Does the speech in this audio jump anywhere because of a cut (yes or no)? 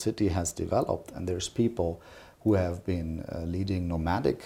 no